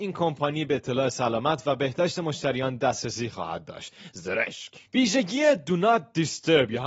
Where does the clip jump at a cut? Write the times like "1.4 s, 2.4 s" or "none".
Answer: 4.9 s